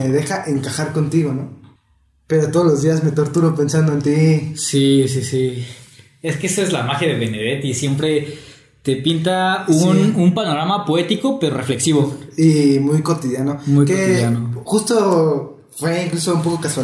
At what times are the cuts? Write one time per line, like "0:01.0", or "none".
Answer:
none